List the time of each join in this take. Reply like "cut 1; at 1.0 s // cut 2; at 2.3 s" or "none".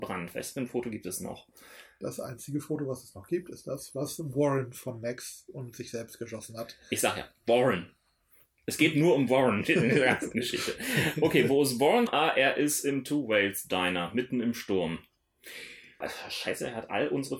cut 1; at 12.1 s // cut 2; at 16.0 s

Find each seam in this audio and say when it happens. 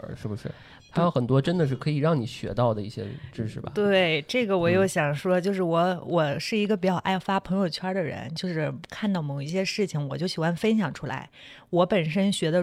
none

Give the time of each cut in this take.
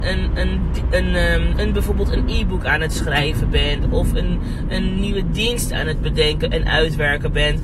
none

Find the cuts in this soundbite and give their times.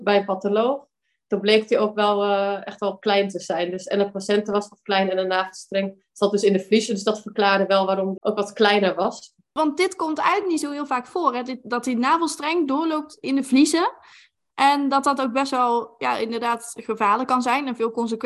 cut 1; at 8.2 s

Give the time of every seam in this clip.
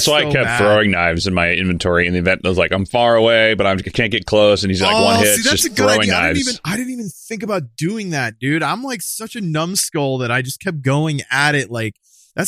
none

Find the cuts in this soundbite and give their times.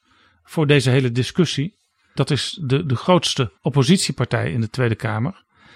cut 1; at 2.2 s // cut 2; at 3.6 s

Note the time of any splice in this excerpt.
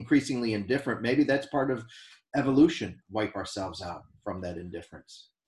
cut 1; at 3.0 s

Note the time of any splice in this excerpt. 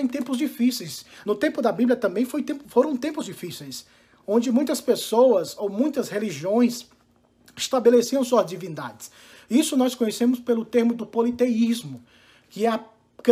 none

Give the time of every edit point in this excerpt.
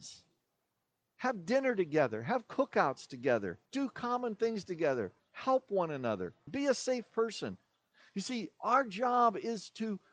cut 1; at 3.7 s // cut 2; at 5.2 s // cut 3; at 6.5 s

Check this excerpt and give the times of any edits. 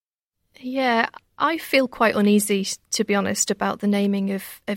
none

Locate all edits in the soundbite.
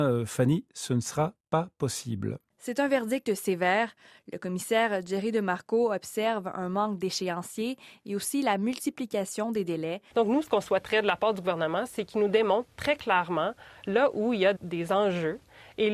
cut 1; at 10.1 s // cut 2; at 14.6 s

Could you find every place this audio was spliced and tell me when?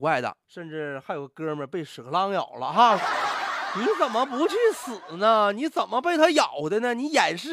none

